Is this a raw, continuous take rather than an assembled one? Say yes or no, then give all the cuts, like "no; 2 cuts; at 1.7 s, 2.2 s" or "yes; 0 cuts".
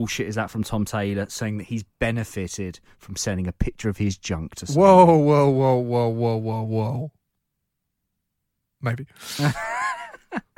yes; 0 cuts